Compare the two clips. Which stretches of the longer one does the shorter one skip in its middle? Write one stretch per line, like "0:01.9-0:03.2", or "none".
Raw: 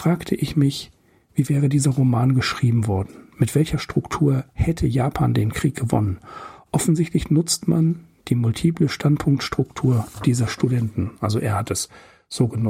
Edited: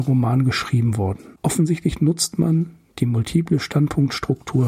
0:03.3-0:06.6